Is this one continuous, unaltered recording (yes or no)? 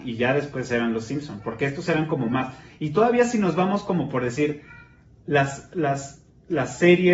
yes